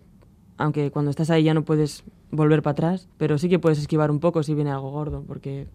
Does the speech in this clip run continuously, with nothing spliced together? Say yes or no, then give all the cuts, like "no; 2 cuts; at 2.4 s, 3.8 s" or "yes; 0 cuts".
no; 1 cut; at 3.1 s